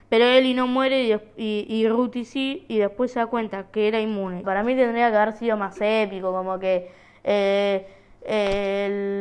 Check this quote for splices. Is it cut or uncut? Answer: cut